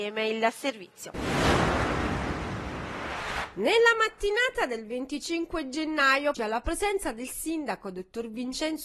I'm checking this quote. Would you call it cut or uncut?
cut